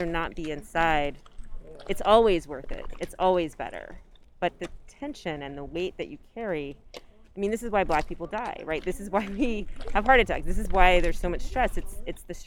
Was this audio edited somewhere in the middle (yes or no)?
no